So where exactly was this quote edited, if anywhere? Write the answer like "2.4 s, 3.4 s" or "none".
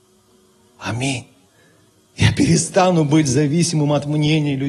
none